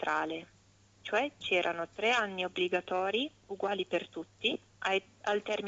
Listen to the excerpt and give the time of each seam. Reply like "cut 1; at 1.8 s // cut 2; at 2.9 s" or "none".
cut 1; at 4.7 s